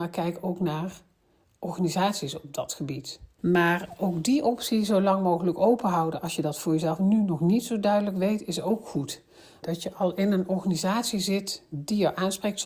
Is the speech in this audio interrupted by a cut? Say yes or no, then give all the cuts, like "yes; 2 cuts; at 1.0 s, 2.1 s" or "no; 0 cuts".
yes; 2 cuts; at 3.4 s, 9.6 s